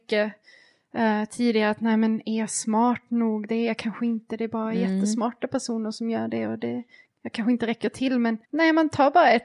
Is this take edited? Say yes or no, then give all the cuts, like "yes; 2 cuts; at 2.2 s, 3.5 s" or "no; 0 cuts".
yes; 1 cut; at 8.4 s